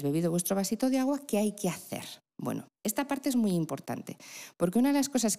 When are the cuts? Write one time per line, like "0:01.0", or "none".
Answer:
0:02.8